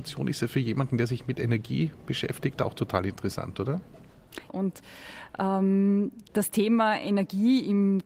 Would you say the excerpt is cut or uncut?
cut